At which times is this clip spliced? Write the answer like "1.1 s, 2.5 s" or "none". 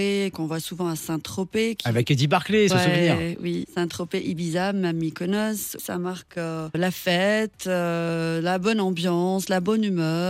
2.7 s